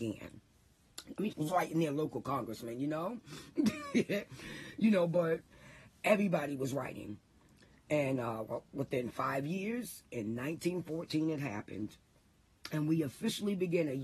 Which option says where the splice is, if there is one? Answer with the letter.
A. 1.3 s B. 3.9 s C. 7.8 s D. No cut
A